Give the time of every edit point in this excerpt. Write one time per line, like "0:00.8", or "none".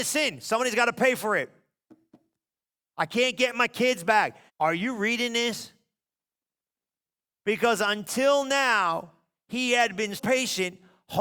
0:04.5
0:07.3
0:10.2